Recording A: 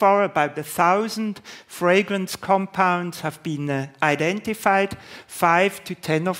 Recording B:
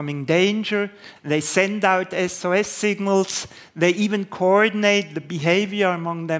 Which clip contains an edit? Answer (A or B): B